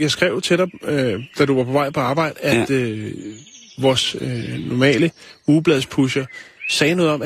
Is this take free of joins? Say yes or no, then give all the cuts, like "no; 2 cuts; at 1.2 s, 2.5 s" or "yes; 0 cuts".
yes; 0 cuts